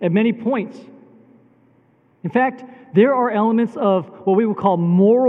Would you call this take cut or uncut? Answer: uncut